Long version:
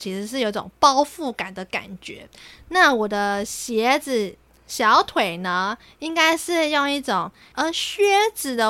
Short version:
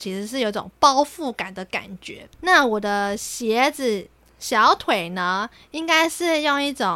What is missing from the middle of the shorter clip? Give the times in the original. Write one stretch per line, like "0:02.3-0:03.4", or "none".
0:02.3-0:02.6

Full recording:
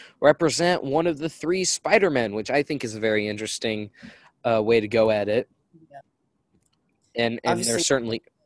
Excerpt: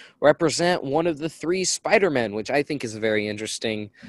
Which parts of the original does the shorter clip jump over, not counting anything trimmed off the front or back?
none

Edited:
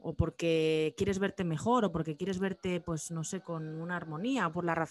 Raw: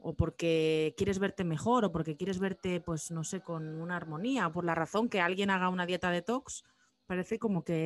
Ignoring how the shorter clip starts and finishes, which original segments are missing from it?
none

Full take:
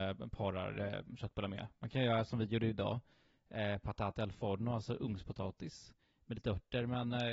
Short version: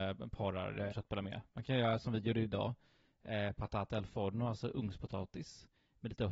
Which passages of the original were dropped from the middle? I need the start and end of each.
0:00.9-0:01.2

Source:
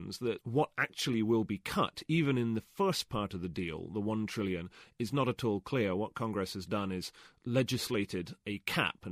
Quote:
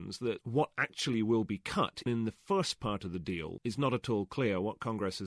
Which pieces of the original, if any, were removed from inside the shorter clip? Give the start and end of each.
0:02.1-0:02.4
0:03.9-0:04.9

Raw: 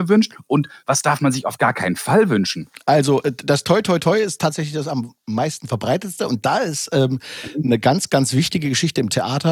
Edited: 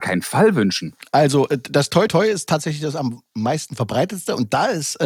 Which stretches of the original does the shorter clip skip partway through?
0:03.8-0:04.0

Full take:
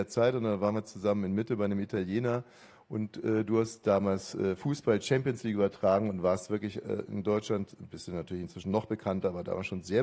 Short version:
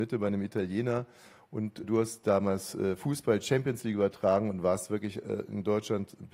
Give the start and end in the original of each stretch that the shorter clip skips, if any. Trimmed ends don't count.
0:03.2-0:03.4

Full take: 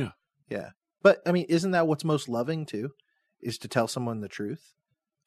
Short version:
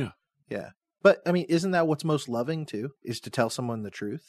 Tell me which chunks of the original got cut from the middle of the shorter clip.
0:03.0-0:03.3

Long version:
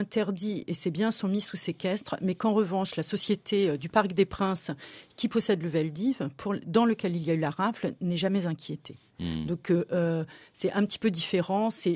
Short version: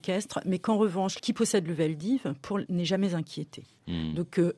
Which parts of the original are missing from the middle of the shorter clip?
0:03.0-0:05.1
0:06.6-0:08.0

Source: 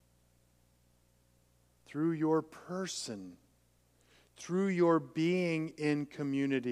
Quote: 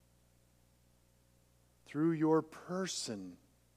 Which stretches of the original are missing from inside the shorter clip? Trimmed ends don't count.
none

